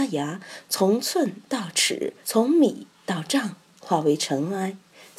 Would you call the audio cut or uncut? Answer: cut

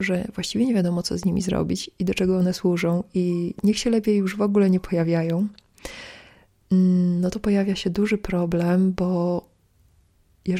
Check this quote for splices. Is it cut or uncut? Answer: uncut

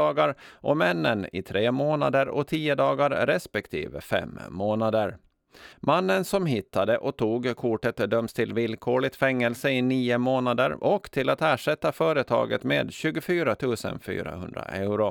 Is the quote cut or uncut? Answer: cut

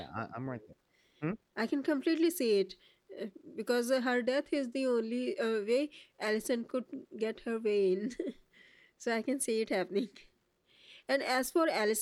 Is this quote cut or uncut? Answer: uncut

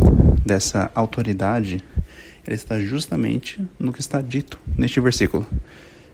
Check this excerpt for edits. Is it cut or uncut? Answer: uncut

